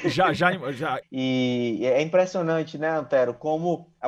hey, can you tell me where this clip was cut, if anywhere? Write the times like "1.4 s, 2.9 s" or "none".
1.0 s

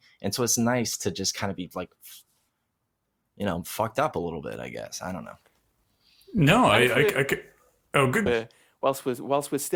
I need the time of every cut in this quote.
8.3 s

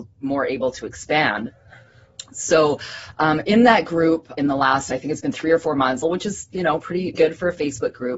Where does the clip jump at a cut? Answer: 4.4 s, 6.0 s, 7.1 s

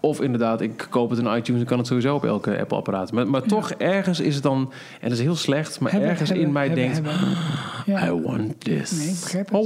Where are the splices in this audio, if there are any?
none

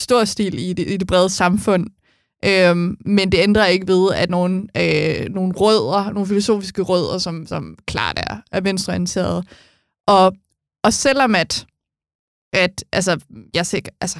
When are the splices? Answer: 4.3 s

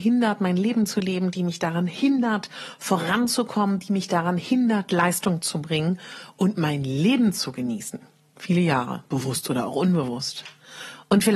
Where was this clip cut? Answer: 8.3 s

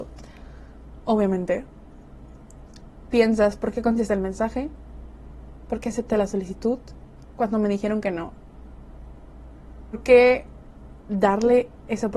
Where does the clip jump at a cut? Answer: none

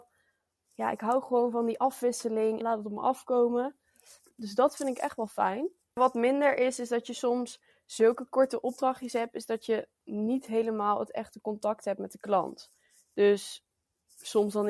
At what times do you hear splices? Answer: 2.6 s

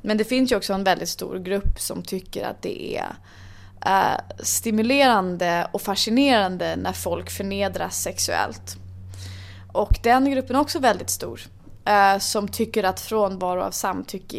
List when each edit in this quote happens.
none

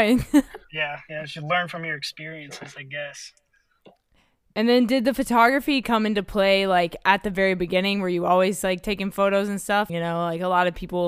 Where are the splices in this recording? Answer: 9.9 s

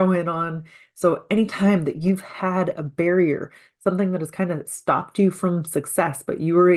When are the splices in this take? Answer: none

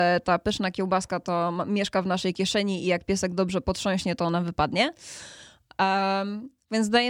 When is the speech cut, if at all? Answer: none

